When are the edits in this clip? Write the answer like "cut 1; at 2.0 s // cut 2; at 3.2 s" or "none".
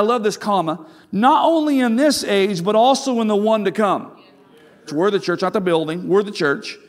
cut 1; at 4.9 s